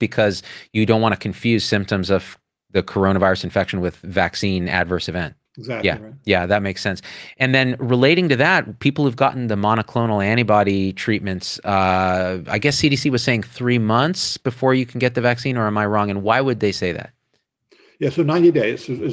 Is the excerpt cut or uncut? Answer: cut